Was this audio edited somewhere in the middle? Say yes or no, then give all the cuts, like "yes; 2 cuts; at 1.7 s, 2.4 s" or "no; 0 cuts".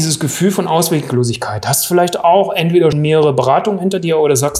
yes; 1 cut; at 2.9 s